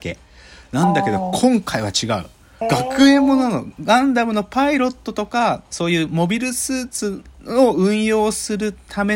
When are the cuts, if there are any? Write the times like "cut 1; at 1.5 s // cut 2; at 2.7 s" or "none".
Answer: cut 1; at 2.6 s